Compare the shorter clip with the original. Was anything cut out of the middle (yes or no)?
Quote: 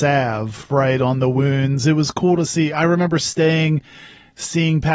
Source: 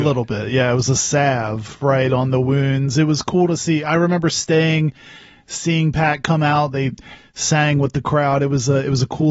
no